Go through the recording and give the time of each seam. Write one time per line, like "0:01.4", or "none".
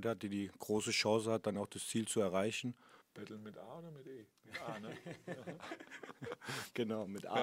0:03.0